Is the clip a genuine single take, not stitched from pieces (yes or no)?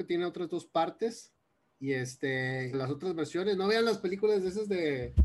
no